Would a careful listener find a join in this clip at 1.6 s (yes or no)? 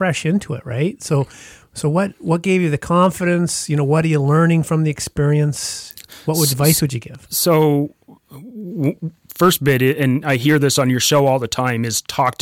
no